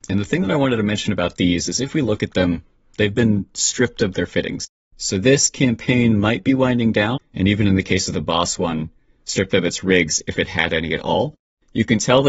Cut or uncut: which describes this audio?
cut